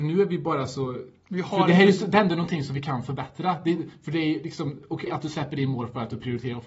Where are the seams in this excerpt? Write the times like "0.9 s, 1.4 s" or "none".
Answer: 5.1 s